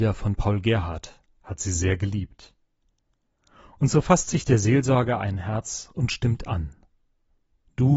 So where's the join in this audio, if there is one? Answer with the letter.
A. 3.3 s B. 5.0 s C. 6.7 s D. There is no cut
D